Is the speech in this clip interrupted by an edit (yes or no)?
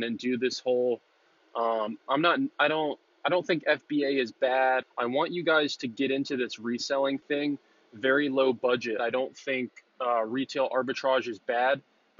yes